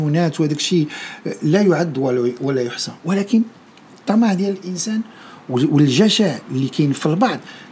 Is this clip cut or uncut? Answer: cut